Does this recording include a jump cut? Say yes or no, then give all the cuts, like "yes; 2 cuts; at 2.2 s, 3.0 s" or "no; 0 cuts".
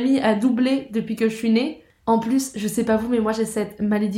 no; 0 cuts